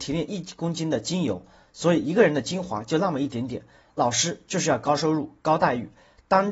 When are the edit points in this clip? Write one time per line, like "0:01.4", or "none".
0:03.8